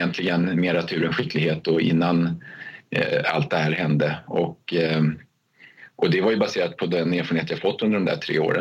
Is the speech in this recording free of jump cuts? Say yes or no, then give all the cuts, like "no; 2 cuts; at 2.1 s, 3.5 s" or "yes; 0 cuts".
yes; 0 cuts